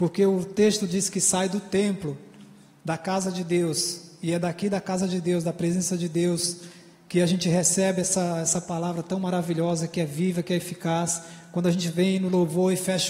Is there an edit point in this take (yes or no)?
no